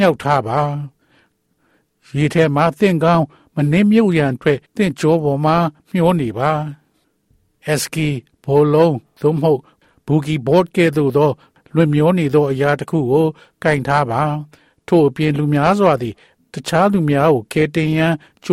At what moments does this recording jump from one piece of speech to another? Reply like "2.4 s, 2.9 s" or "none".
4.6 s